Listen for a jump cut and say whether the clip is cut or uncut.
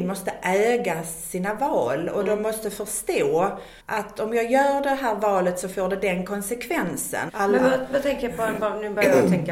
cut